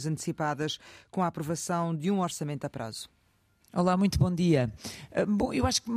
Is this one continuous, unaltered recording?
yes; 0 cuts

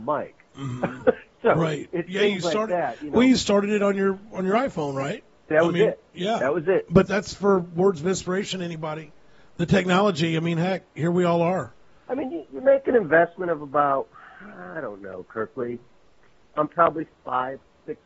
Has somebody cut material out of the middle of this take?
yes; 2 cuts; at 5.5 s, 7.1 s

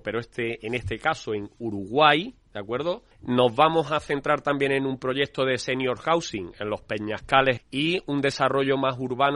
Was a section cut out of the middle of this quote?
yes; 2 cuts; at 3.1 s, 7.6 s

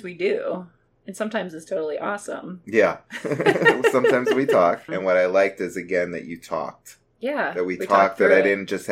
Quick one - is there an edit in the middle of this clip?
yes; 1 cut; at 4.9 s

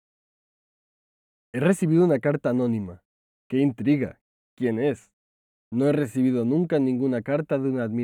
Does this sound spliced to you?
yes; 1 cut; at 3.3 s

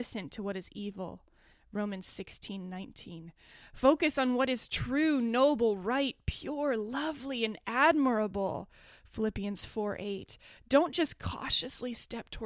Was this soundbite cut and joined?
no; 0 cuts

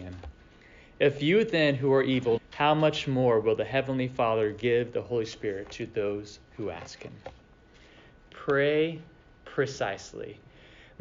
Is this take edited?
yes; 1 cut; at 2.4 s

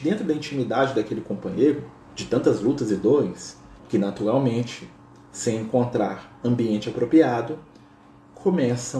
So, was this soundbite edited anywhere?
yes; 2 cuts; at 2.0 s, 3.8 s

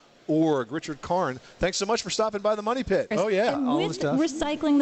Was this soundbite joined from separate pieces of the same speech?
yes; 1 cut; at 3.1 s

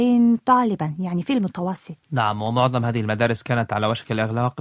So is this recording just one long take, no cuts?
no; 1 cut; at 2.0 s

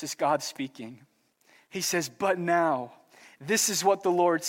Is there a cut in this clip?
no; 0 cuts

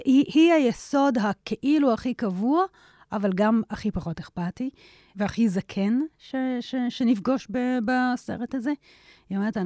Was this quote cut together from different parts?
no; 0 cuts

